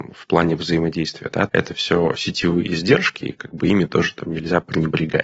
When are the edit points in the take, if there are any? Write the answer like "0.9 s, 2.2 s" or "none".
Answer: 1.5 s